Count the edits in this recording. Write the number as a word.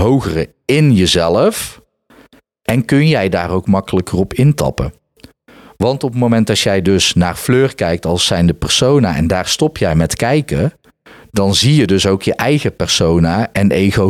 zero